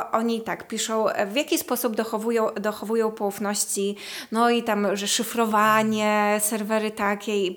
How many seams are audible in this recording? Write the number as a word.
zero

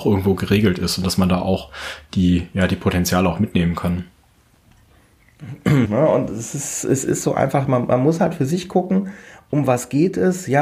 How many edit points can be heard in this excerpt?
one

